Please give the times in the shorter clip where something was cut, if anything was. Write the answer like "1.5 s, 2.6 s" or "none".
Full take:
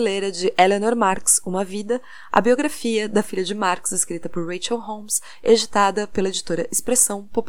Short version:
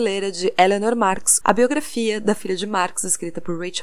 1.4 s